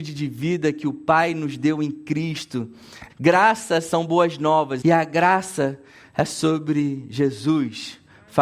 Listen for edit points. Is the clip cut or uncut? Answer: cut